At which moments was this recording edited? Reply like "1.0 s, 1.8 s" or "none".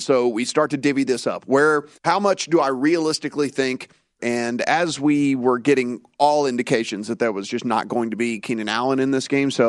1.9 s, 4.2 s